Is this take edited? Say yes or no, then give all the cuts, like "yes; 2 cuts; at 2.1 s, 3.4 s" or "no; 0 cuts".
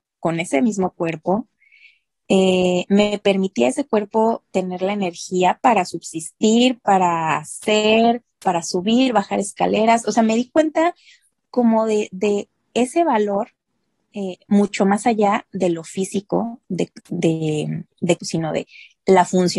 yes; 2 cuts; at 17.0 s, 18.2 s